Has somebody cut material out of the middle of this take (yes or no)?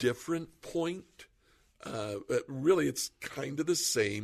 no